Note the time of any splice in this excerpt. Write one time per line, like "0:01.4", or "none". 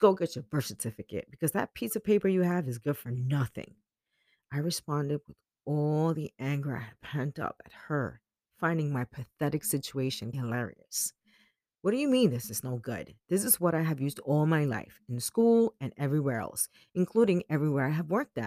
0:10.3